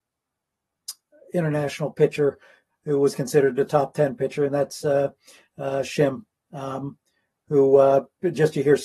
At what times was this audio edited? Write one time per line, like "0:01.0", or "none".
none